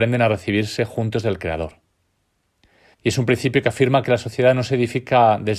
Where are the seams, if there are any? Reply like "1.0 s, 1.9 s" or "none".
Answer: 2.9 s